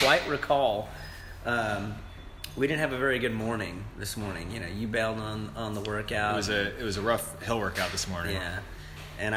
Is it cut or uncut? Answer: uncut